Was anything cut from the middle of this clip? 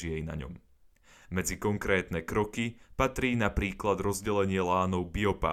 yes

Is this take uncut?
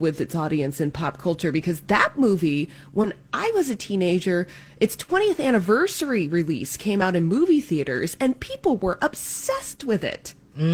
yes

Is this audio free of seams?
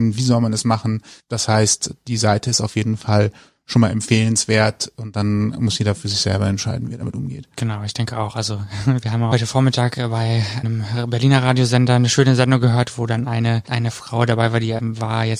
yes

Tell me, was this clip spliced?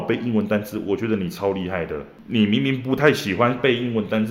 no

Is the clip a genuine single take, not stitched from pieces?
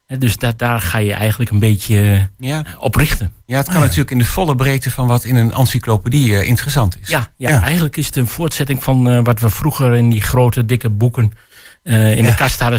yes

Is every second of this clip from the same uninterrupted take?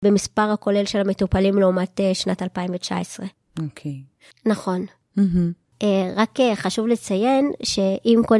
no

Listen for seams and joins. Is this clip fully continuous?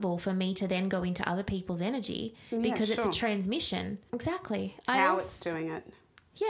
no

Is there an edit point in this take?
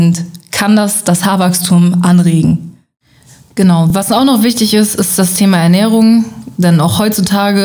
no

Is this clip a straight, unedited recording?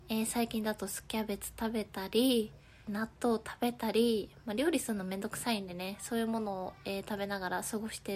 no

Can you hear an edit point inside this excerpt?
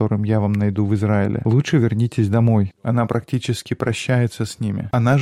yes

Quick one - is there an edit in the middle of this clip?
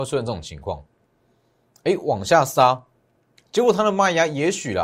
no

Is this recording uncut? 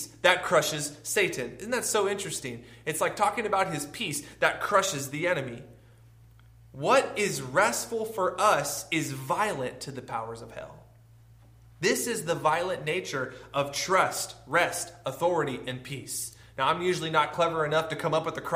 yes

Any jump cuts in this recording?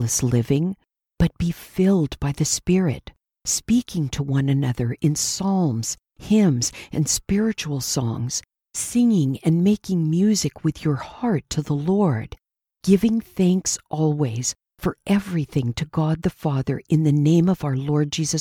no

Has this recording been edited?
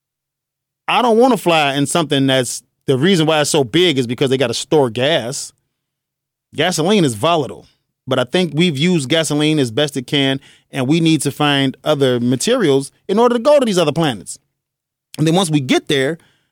no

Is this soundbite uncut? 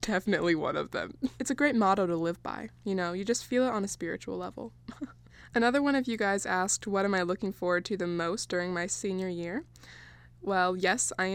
yes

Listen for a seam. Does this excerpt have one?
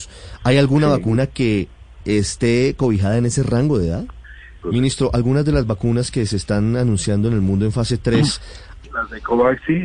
yes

